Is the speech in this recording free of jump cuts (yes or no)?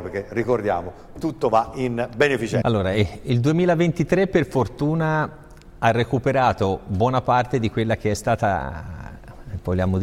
no